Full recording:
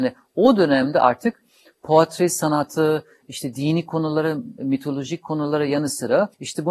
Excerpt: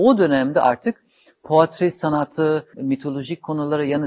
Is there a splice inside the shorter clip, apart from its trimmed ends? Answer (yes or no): yes